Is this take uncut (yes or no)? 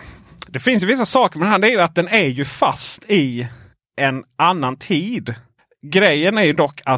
yes